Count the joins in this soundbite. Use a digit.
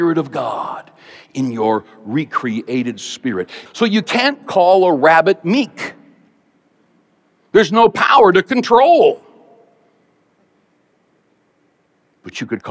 1